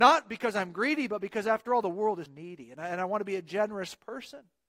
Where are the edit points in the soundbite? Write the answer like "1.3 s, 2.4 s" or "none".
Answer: 2.3 s